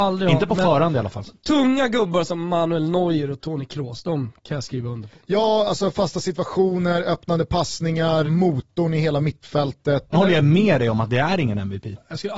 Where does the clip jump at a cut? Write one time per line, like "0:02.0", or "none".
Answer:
0:08.3
0:10.1